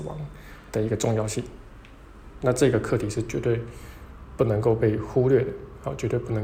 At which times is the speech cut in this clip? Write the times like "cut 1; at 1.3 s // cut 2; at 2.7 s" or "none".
none